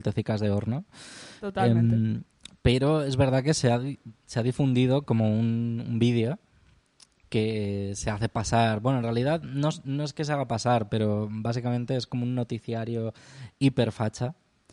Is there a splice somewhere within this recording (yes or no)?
no